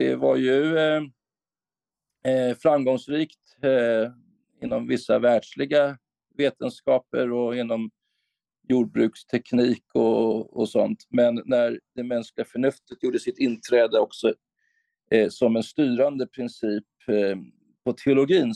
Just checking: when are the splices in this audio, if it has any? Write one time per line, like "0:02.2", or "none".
none

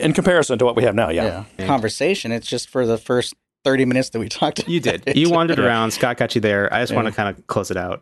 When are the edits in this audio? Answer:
0:01.6

